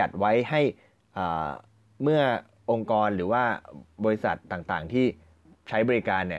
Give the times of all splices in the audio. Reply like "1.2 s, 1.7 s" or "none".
none